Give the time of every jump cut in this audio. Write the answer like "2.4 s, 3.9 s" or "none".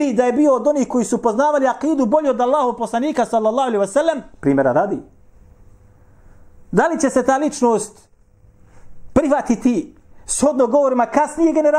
4.3 s